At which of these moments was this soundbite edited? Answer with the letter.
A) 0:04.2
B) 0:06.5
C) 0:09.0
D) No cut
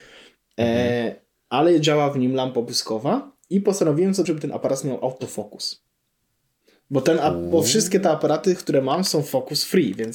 A